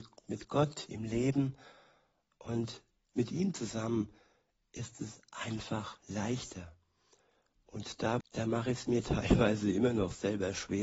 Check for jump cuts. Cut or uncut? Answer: cut